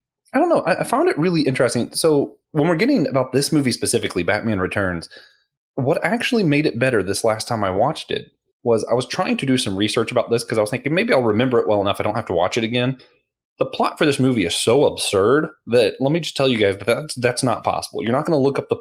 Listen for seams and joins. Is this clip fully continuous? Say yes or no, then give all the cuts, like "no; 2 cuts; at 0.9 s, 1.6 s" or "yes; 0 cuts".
yes; 0 cuts